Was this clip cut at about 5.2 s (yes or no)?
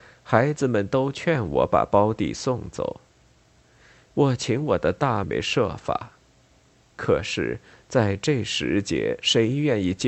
yes